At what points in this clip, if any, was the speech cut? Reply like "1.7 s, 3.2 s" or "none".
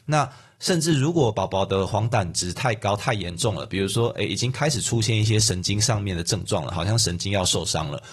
none